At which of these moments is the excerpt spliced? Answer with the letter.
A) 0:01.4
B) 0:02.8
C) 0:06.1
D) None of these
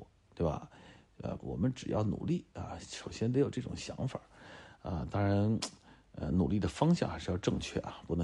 A